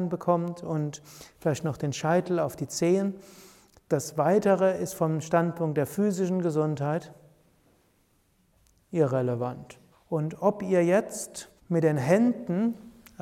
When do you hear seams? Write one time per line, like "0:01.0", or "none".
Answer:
0:09.9
0:11.6

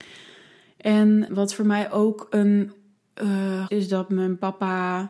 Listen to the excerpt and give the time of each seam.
0:01.3
0:03.7

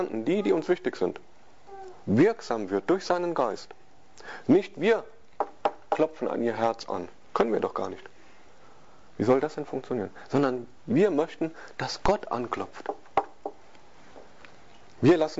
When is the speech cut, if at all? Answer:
none

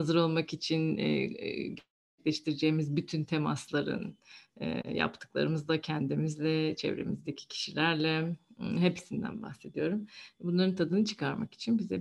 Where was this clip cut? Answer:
none

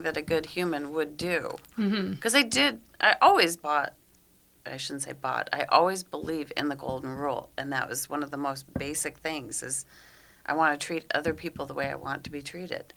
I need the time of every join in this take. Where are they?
none

